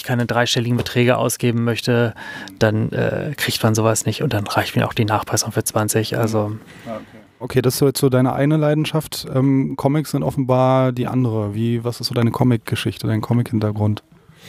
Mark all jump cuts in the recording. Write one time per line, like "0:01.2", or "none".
none